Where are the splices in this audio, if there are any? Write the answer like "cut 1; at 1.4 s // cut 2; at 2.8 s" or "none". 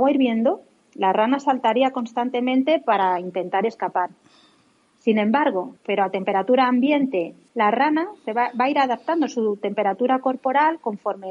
cut 1; at 5.8 s // cut 2; at 7.5 s